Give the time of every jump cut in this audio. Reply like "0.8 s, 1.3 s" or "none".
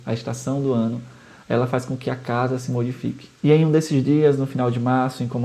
3.4 s